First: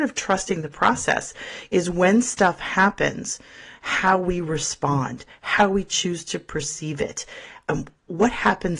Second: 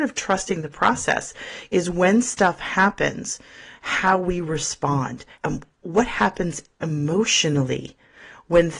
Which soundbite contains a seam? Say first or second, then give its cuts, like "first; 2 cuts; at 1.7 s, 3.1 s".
second; 1 cut; at 5.4 s